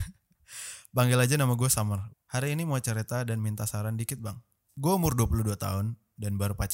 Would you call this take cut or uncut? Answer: cut